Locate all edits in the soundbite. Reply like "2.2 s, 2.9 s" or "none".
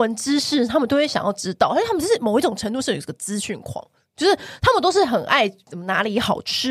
none